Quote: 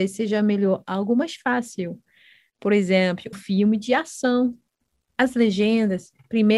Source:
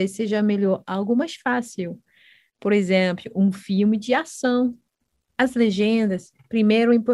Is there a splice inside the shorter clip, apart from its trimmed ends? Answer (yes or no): yes